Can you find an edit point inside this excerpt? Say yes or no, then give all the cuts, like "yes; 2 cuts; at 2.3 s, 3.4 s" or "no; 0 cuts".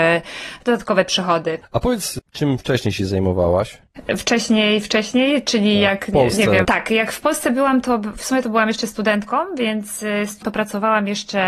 yes; 2 cuts; at 6.6 s, 10.4 s